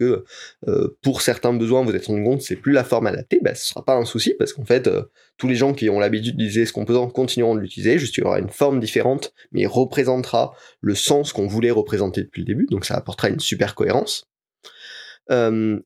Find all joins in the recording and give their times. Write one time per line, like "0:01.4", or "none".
none